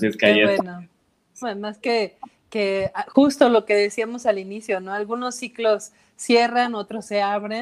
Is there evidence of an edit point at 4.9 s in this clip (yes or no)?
no